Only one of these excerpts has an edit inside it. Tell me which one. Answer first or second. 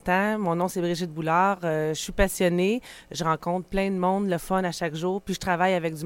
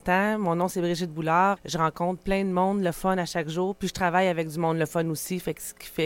second